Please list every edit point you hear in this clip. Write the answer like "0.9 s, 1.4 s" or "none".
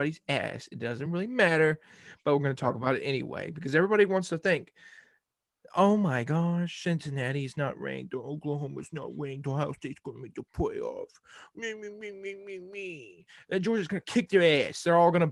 none